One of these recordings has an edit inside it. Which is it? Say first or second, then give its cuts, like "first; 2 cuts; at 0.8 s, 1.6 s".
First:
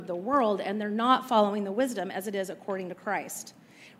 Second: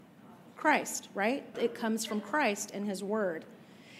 second; 1 cut; at 1.5 s